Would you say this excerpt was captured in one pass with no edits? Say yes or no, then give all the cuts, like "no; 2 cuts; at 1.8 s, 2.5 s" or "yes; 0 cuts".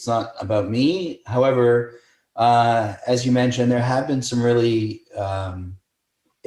yes; 0 cuts